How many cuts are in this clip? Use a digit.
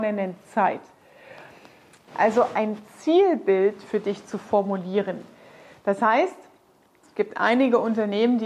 2